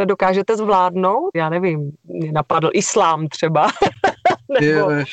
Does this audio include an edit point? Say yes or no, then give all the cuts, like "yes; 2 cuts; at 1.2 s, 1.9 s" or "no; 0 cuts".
yes; 1 cut; at 1.3 s